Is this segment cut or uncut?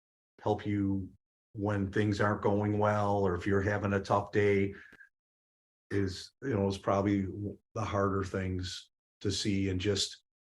uncut